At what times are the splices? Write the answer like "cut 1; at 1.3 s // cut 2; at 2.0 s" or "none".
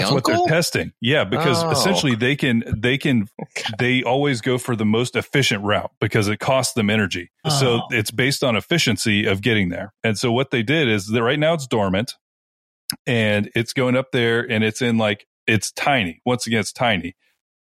cut 1; at 3.3 s // cut 2; at 7.4 s